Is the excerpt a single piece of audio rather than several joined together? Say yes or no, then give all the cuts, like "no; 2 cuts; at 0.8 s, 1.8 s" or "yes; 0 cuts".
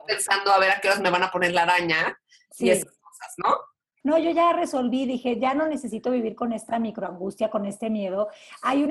no; 1 cut; at 4.0 s